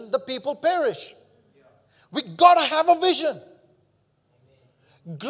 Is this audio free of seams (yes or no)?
yes